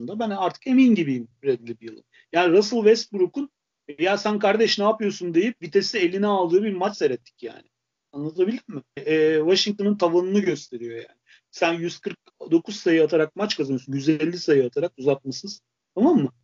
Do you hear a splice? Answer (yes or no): yes